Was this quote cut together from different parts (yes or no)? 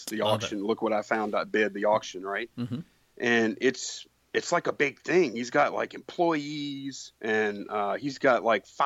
yes